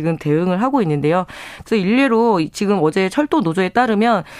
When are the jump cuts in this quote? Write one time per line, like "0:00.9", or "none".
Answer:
0:01.6